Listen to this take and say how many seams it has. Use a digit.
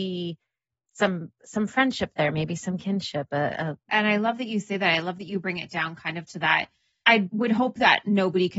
1